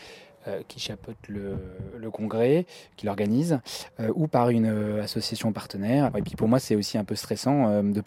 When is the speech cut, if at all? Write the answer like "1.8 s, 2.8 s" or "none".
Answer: 6.1 s